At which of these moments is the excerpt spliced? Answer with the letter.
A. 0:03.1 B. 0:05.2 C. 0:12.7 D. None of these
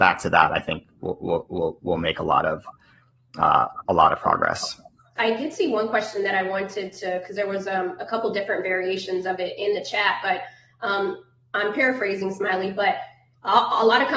B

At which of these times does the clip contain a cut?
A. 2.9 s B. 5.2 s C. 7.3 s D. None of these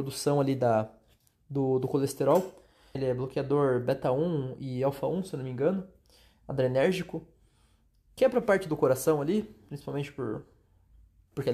A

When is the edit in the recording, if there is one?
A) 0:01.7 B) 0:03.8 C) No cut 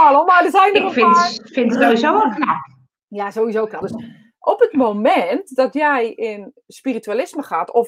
B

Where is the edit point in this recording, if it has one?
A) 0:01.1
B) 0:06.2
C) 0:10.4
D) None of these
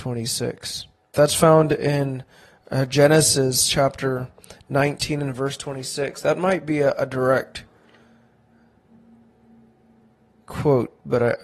A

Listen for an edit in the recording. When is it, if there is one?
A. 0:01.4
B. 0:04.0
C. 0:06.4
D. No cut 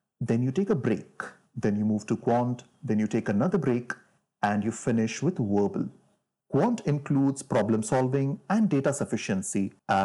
C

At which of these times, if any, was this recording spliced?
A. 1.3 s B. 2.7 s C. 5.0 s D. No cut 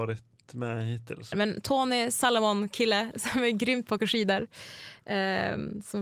A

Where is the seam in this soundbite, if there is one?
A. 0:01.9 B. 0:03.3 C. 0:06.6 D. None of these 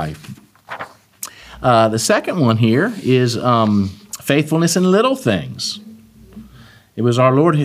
D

